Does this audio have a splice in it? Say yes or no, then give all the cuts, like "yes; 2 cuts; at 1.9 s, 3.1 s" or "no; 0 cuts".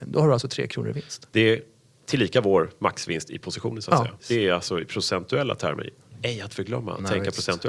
yes; 1 cut; at 4.2 s